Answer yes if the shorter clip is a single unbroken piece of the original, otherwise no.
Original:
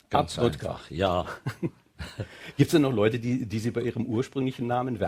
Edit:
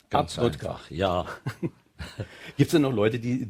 yes